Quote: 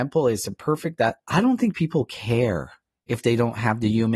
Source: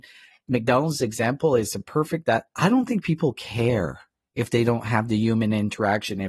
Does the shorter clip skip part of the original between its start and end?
no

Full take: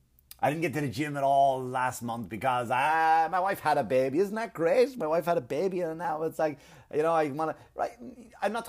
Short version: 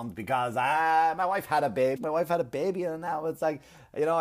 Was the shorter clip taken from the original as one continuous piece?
no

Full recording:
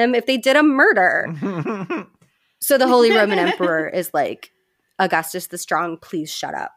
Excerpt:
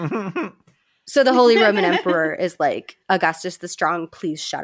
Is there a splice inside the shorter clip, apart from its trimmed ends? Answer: yes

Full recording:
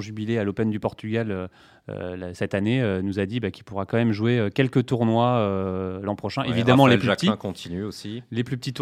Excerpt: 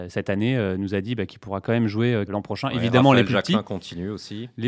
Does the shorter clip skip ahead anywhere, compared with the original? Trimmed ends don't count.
yes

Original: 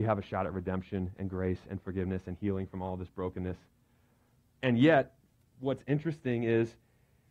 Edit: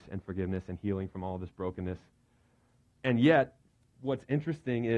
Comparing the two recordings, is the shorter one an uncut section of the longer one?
yes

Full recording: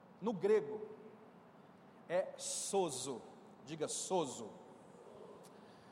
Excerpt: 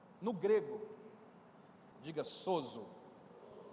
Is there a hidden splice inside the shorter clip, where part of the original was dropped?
yes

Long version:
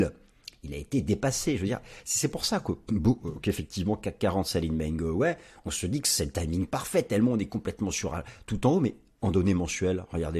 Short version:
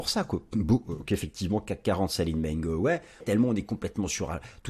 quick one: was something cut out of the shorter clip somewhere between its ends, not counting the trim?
yes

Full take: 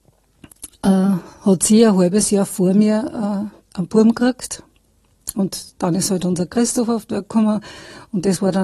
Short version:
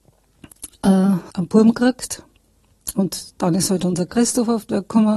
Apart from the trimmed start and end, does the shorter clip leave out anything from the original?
yes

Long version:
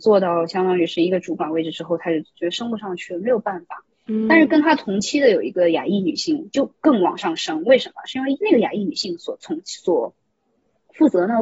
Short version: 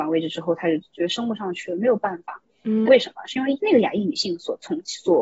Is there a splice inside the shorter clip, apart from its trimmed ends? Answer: yes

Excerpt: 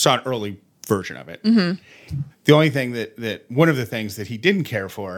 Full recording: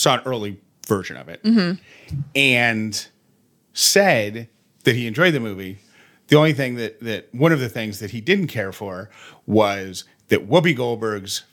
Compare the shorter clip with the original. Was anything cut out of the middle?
yes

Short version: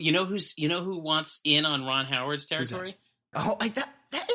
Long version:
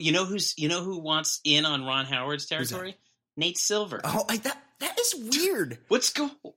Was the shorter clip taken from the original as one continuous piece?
no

